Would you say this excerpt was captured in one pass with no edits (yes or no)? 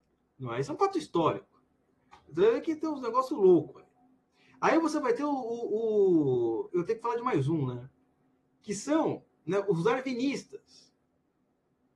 no